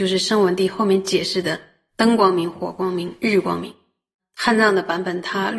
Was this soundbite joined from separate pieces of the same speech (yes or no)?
yes